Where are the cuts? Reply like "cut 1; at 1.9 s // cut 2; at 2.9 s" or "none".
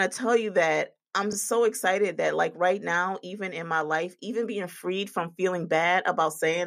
none